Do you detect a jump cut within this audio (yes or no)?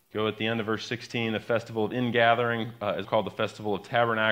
yes